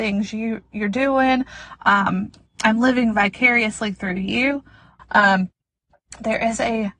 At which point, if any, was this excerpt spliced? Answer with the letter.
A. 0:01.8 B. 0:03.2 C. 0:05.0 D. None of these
C